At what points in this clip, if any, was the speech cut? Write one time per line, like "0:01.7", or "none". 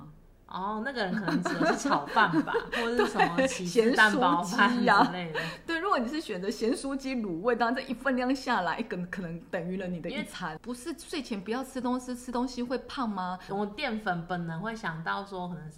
0:10.6
0:13.5